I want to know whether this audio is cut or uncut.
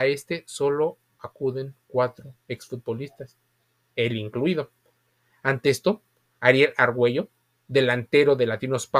uncut